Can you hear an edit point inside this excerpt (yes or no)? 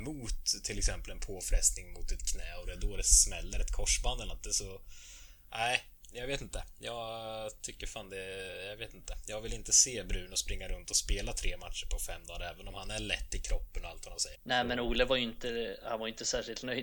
yes